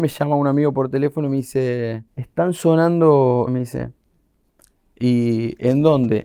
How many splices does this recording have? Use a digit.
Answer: 2